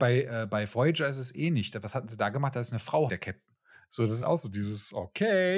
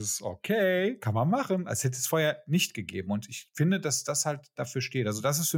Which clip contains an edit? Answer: first; 2 cuts; at 3.1 s, 4.2 s

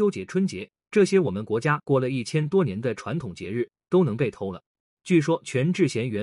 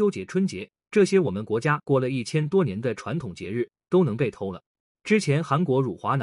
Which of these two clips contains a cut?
first; 1 cut; at 4.9 s

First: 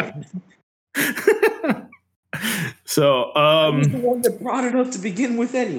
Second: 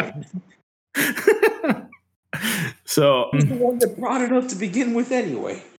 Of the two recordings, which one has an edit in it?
second; 1 cut; at 3.3 s

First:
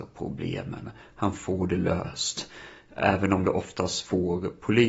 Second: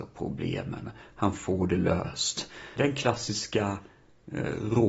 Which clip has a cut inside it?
second; 1 cut; at 2.8 s

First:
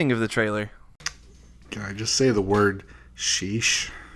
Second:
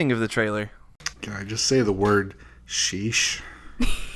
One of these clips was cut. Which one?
second; 1 cut; at 1.1 s

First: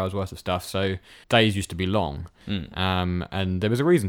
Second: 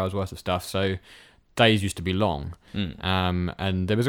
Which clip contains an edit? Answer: first; 1 cut; at 1.2 s

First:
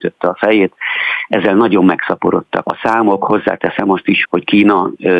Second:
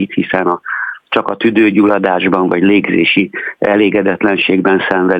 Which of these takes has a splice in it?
first; 2 cuts; at 2.6 s, 4.2 s

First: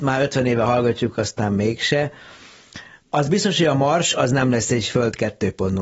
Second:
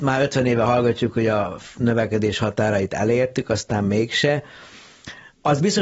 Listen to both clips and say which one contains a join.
first; 1 cut; at 1.1 s

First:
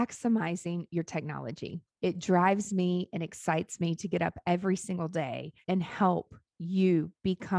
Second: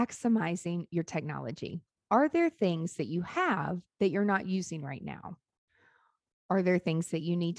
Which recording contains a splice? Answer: first; 2 cuts; at 2.0 s, 5.6 s

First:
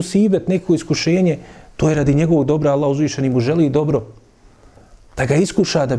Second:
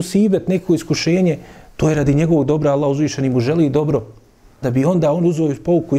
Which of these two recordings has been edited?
second; 1 cut; at 4.6 s

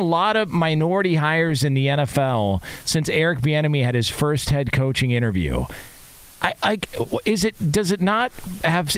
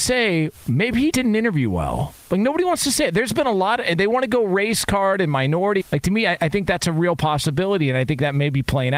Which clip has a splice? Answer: second; 3 cuts; at 1.1 s, 2.2 s, 5.8 s

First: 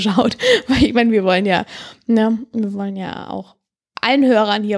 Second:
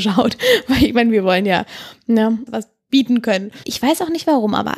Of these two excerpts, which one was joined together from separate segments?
second; 2 cuts; at 2.5 s, 3.6 s

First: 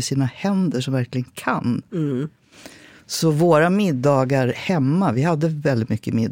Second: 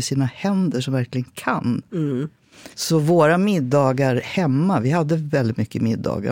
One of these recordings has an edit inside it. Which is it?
second; 1 cut; at 2.7 s

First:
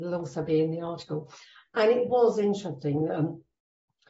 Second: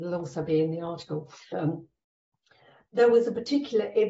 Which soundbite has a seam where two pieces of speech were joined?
second; 1 cut; at 1.5 s

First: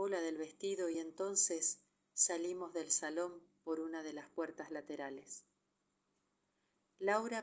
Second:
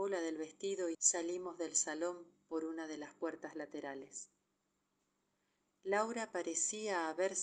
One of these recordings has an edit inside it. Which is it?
second; 1 cut; at 0.9 s

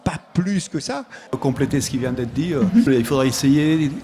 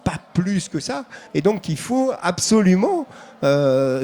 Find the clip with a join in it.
first; 2 cuts; at 1.3 s, 2.9 s

